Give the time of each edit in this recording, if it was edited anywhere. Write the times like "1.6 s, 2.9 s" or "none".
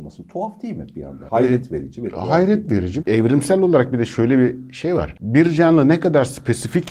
3.0 s